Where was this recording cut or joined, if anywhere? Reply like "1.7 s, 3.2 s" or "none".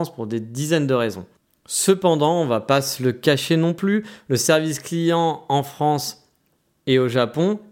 none